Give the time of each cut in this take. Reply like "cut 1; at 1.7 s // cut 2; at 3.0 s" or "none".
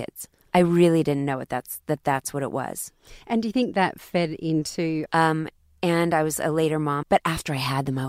cut 1; at 5.1 s // cut 2; at 7.0 s